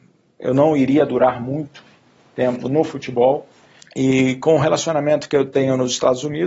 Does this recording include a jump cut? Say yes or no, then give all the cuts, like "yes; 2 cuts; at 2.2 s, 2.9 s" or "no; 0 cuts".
yes; 1 cut; at 3.8 s